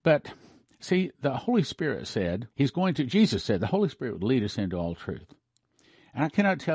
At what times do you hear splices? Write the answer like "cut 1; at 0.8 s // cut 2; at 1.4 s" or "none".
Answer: cut 1; at 2.5 s